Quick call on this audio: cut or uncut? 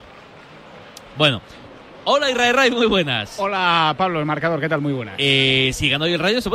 uncut